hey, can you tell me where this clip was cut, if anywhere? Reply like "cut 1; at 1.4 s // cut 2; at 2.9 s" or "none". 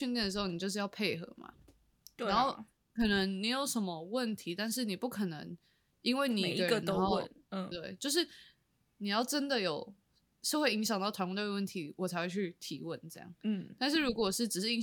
cut 1; at 7.7 s